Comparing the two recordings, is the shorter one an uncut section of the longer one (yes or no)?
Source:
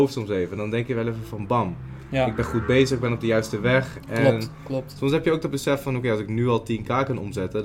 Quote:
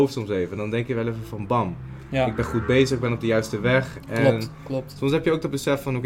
yes